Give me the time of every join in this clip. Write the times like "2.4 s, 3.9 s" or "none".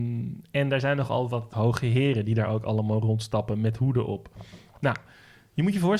1.5 s